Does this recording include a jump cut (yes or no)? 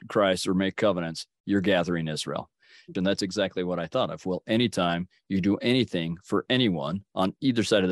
yes